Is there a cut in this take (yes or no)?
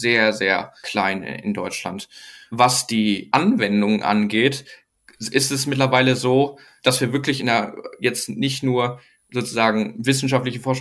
no